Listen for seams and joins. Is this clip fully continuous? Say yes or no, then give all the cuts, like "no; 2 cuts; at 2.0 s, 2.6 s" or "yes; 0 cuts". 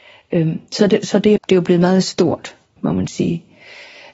no; 2 cuts; at 1.4 s, 2.8 s